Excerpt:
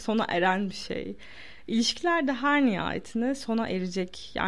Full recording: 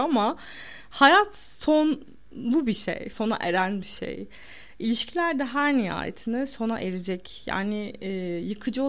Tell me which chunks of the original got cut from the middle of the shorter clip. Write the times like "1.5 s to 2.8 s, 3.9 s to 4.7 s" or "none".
none